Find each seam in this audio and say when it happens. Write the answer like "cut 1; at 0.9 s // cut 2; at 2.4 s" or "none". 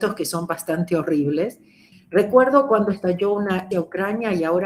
cut 1; at 1.9 s // cut 2; at 3.7 s